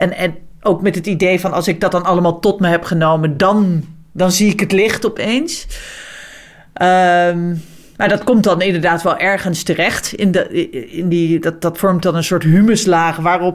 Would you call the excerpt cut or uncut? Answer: uncut